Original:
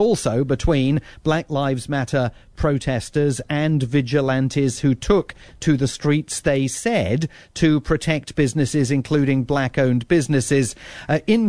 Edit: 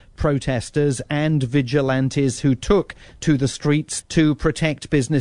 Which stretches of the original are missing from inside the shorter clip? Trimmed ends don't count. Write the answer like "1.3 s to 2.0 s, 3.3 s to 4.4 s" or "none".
6.4 s to 7.5 s

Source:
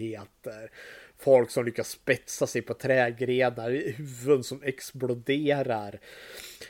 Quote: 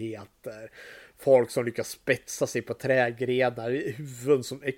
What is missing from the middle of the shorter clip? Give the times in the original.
none

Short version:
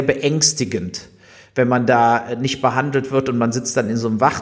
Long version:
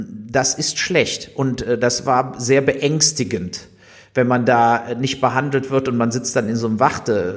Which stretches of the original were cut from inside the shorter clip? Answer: none

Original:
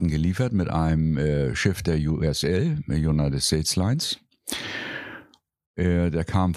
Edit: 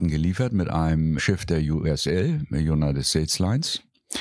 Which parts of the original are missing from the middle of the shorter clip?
1.2 s to 1.5 s

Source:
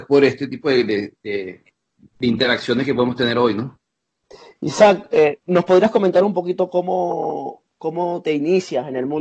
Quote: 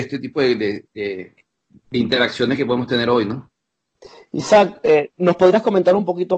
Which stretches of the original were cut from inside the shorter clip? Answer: none

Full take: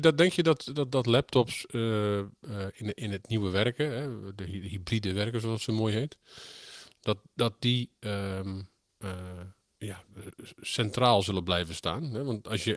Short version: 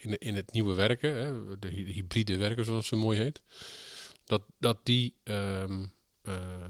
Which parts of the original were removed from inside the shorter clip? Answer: none

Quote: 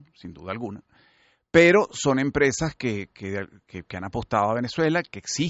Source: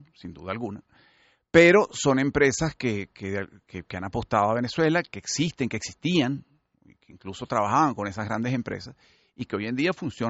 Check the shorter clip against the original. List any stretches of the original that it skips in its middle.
none

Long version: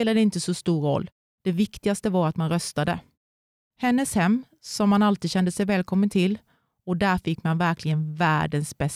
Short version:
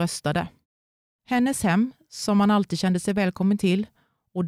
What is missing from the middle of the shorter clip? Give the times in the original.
none

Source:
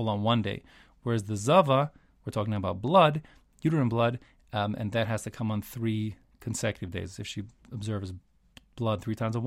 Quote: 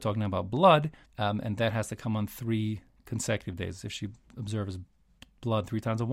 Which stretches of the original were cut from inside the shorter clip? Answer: 3.4 s to 4.4 s

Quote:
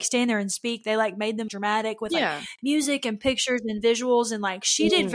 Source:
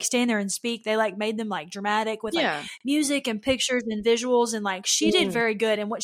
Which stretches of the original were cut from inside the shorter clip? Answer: 1.5 s to 1.7 s

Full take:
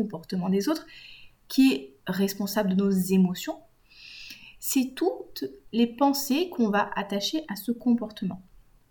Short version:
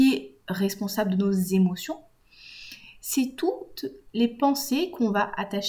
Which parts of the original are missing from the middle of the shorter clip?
none

